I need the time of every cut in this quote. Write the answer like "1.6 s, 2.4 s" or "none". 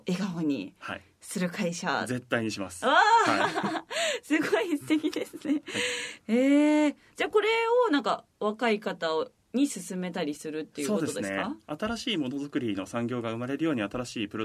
6.2 s